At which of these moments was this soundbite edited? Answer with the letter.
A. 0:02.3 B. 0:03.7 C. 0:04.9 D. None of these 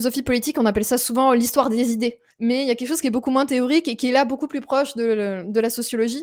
A